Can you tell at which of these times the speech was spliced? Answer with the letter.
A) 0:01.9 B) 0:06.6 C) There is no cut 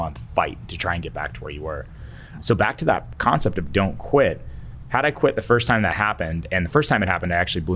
C